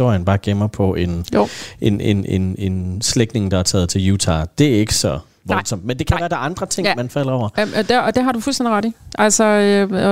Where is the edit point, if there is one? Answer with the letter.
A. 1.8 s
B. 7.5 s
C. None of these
C